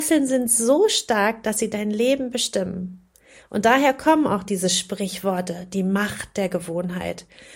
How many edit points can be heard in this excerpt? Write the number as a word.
zero